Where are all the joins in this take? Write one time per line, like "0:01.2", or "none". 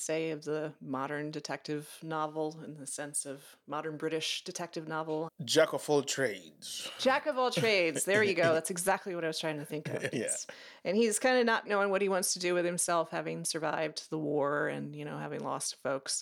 0:05.3
0:10.1
0:11.6